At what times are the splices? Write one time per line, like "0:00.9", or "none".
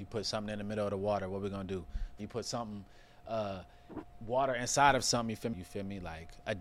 0:02.2
0:05.5

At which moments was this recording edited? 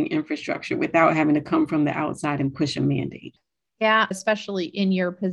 0:04.1

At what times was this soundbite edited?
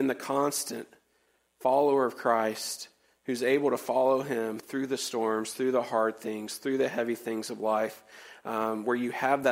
0:04.6

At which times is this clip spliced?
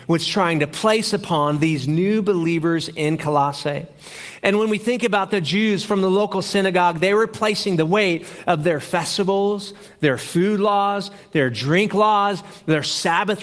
none

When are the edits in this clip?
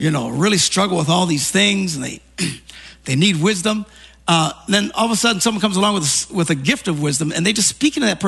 none

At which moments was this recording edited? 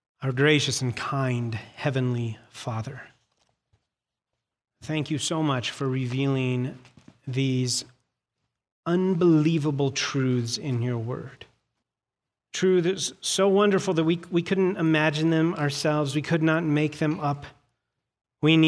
none

